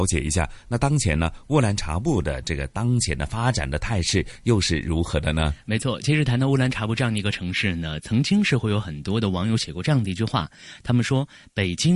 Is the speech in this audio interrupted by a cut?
no; 0 cuts

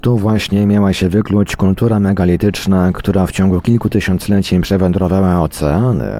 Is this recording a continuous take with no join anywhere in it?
yes; 0 cuts

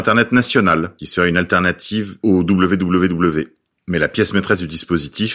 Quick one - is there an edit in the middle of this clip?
yes; 1 cut; at 3.8 s

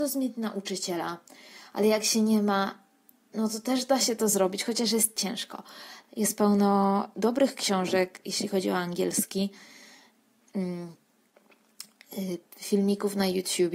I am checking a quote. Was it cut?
no; 0 cuts

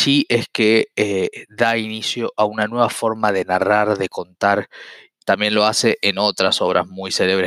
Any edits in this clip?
yes; 1 cut; at 5.2 s

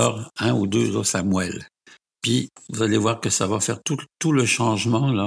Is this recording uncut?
yes; 0 cuts

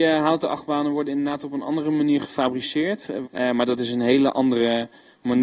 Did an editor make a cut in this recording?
yes; 1 cut; at 3.2 s

